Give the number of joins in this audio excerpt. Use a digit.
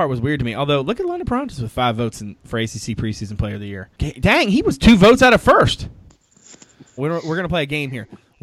2